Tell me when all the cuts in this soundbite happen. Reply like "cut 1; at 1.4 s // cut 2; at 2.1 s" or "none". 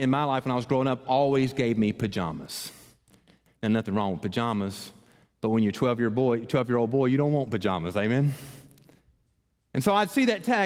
none